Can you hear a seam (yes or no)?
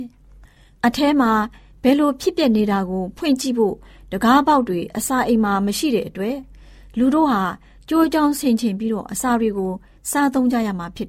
no